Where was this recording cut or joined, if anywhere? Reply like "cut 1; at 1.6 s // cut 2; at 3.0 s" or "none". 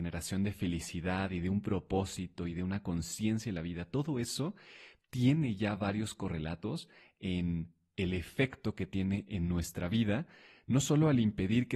none